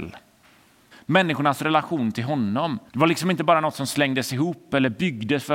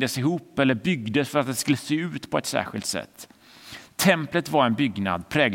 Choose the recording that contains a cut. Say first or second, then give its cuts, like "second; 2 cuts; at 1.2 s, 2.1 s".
first; 2 cuts; at 0.9 s, 2.9 s